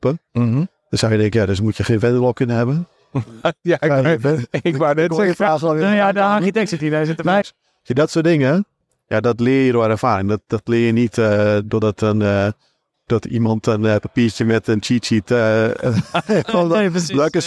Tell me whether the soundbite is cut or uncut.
cut